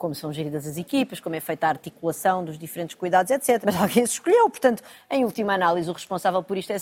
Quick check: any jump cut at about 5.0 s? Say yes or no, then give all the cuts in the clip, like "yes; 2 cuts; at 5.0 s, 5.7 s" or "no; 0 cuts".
no; 1 cut; at 3.6 s